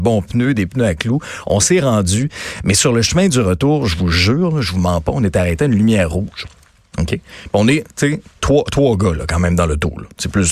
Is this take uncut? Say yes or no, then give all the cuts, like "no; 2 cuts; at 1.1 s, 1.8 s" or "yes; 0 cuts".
yes; 0 cuts